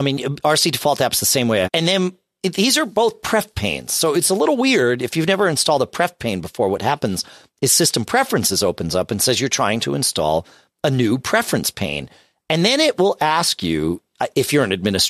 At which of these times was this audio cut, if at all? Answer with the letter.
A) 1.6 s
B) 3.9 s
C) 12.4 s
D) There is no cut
A